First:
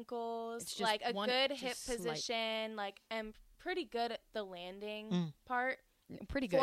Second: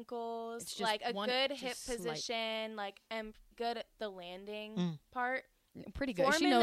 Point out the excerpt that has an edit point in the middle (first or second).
second